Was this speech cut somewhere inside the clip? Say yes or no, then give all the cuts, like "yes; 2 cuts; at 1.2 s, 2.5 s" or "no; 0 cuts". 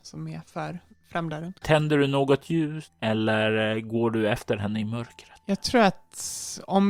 yes; 1 cut; at 1.6 s